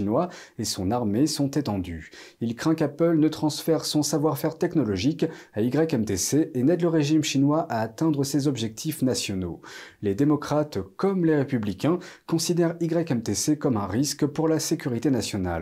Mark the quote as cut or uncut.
uncut